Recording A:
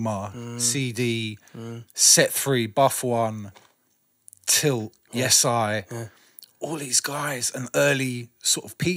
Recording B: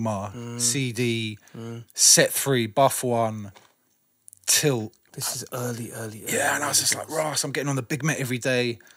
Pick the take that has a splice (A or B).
B